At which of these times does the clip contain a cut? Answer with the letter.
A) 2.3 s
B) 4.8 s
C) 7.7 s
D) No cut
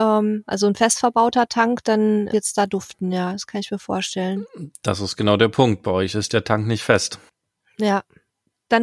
A